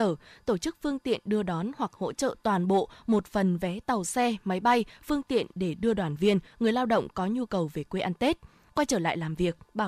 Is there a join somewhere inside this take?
no; 0 cuts

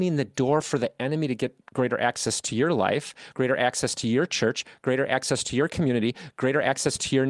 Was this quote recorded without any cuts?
no; 1 cut; at 3.3 s

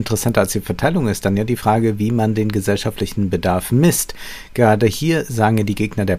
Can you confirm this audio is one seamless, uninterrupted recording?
yes; 0 cuts

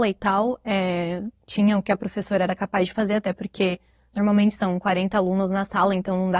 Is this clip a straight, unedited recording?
yes; 0 cuts

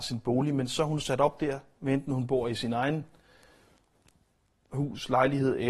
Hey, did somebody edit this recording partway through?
no; 0 cuts

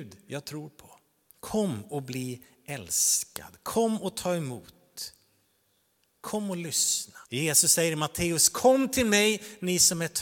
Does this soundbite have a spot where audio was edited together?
yes; 2 cuts; at 1.3 s, 7.3 s

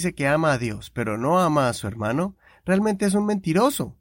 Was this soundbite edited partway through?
no; 0 cuts

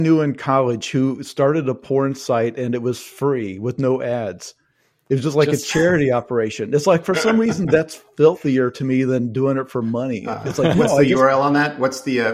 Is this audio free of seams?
yes; 0 cuts

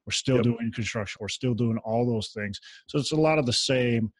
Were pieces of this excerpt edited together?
yes; 1 cut; at 1.1 s

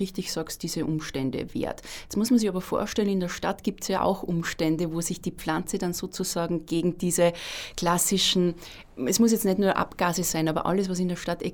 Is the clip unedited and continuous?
yes; 0 cuts

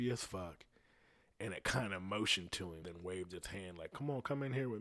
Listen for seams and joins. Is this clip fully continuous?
no; 1 cut; at 2.8 s

